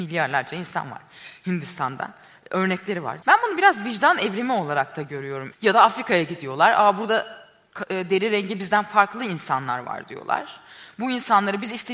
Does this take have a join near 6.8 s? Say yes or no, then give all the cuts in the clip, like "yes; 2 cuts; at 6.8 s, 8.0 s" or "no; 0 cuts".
no; 2 cuts; at 3.2 s, 5.5 s